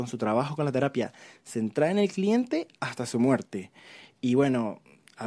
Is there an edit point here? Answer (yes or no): no